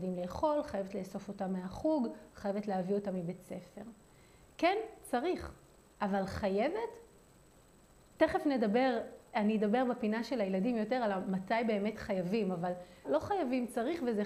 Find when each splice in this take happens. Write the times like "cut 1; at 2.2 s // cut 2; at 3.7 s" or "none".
cut 1; at 13.0 s